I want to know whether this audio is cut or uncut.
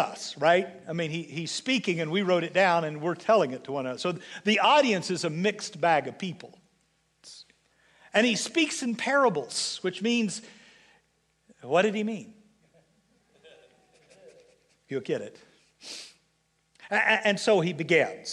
uncut